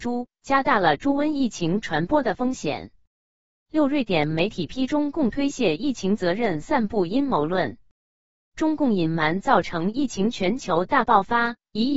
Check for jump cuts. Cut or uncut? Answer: uncut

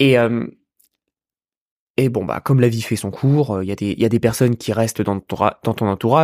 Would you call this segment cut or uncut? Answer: uncut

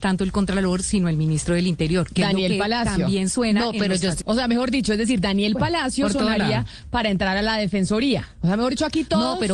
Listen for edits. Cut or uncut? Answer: cut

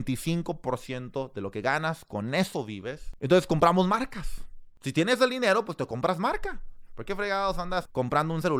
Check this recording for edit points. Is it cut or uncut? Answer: cut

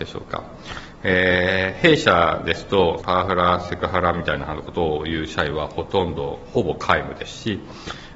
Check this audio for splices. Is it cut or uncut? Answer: cut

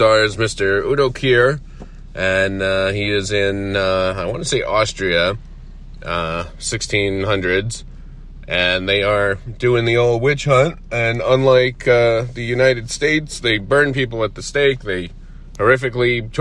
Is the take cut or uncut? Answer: uncut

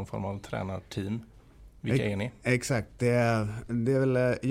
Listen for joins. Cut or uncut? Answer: uncut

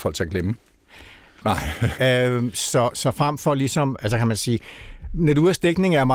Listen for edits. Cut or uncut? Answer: cut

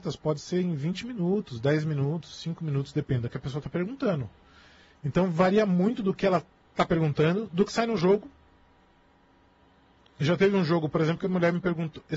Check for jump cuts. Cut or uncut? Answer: uncut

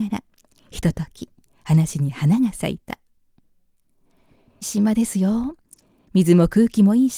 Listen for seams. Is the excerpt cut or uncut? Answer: cut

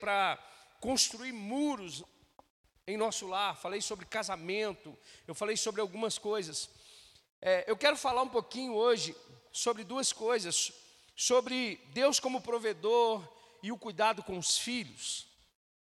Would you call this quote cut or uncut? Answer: uncut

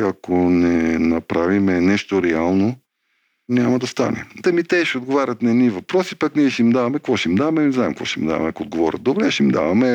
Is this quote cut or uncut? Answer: cut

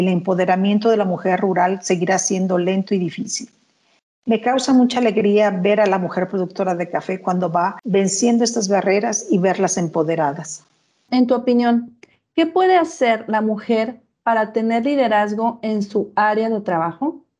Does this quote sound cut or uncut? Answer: uncut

